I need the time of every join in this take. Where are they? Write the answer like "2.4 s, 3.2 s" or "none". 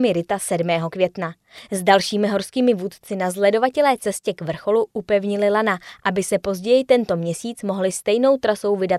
none